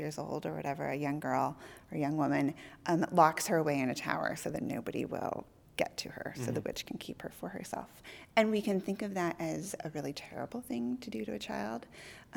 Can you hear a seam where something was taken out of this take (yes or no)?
no